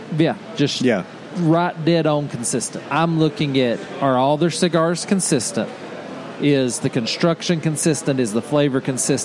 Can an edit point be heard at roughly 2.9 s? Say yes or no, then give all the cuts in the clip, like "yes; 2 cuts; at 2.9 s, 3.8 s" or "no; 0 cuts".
yes; 1 cut; at 2.9 s